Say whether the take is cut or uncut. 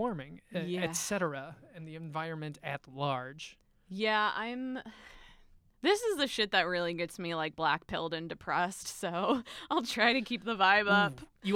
uncut